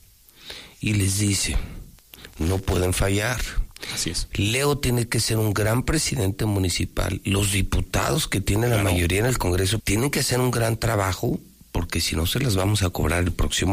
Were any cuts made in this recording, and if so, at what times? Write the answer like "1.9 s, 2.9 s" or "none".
9.8 s